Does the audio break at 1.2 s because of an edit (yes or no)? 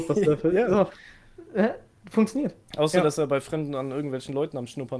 no